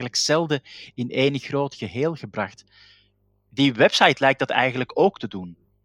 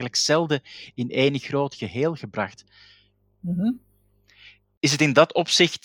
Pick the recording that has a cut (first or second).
second